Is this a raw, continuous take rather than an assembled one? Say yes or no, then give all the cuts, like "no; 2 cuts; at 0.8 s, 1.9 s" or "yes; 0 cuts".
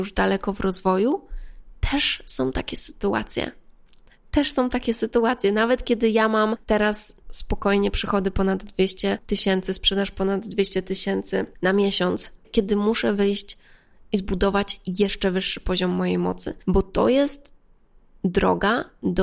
no; 1 cut; at 12.4 s